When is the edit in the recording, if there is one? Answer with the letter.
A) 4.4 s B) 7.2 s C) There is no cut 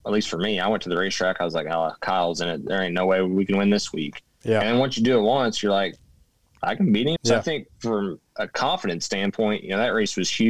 B